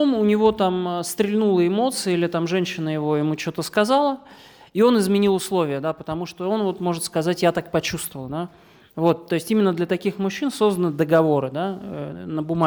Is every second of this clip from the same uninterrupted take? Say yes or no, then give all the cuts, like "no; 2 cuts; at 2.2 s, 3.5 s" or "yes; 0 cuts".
yes; 0 cuts